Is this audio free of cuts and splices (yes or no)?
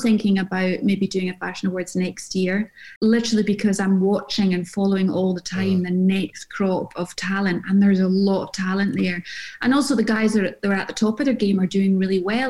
no